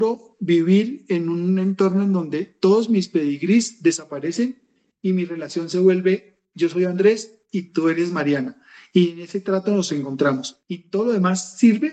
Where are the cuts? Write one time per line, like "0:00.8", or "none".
0:10.6